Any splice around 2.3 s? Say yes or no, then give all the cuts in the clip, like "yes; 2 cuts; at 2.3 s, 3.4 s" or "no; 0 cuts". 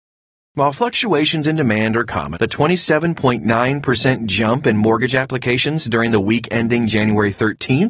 yes; 1 cut; at 2.3 s